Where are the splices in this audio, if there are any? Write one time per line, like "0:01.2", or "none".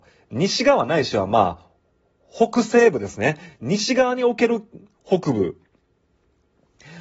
none